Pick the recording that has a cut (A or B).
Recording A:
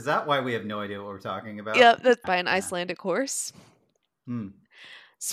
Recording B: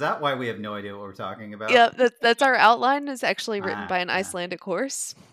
A